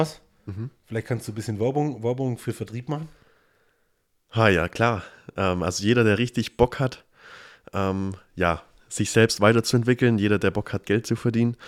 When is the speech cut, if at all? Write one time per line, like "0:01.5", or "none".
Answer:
none

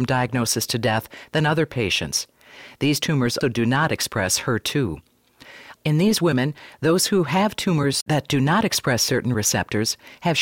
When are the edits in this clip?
0:03.4
0:05.8

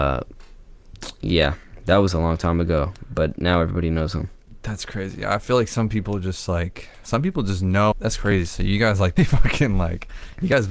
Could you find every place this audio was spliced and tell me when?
0:07.9
0:09.2

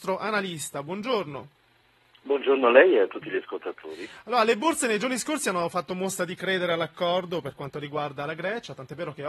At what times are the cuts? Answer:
none

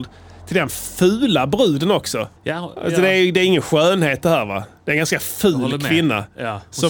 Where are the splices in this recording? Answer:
0:02.4

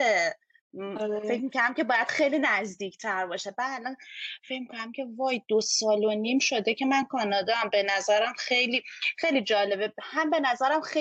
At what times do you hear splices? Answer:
none

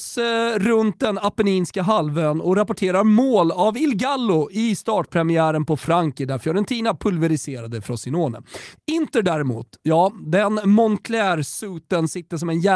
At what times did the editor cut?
0:08.7

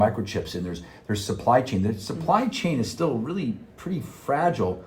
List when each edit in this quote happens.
none

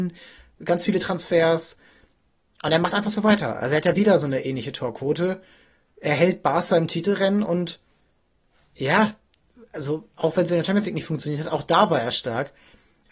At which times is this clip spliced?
none

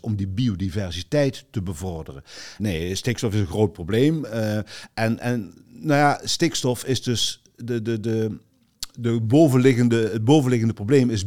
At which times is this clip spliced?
0:02.6

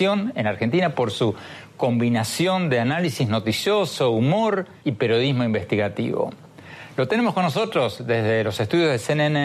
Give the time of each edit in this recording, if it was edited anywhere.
0:04.8

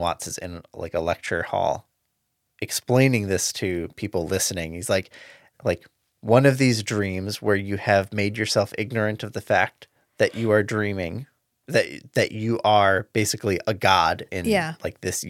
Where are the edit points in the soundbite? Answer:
0:05.5

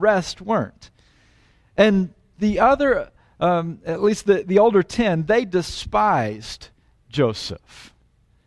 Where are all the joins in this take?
none

